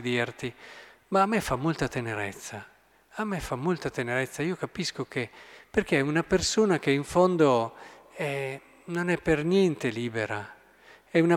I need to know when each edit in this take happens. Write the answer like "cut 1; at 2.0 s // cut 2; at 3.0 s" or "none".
none